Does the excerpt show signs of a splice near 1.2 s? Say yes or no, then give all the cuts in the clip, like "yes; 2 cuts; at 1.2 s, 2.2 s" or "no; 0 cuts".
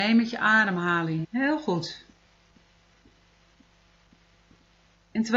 yes; 1 cut; at 1.2 s